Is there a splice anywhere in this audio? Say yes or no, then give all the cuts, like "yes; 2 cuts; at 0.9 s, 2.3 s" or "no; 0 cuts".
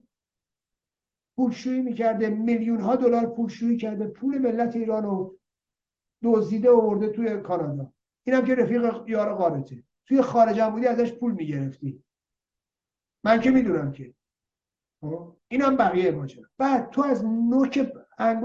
yes; 3 cuts; at 9.9 s, 15.4 s, 16.5 s